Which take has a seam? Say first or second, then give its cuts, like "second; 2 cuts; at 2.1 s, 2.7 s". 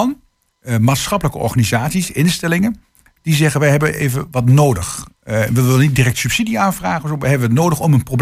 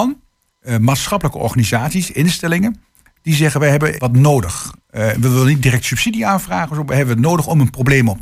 second; 1 cut; at 4.0 s